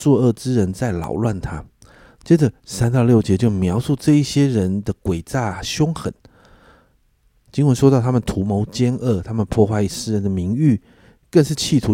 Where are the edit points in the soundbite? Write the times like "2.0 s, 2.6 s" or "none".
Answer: none